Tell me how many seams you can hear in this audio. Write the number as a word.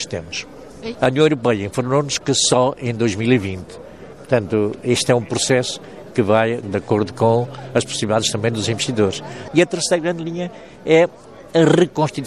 three